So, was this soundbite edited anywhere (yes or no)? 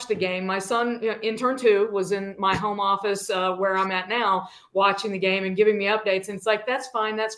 no